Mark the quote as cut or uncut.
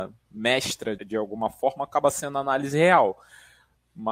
cut